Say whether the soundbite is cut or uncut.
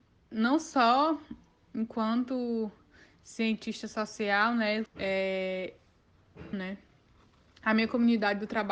cut